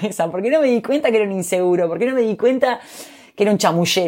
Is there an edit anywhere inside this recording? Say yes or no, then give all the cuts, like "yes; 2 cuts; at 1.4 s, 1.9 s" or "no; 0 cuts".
no; 0 cuts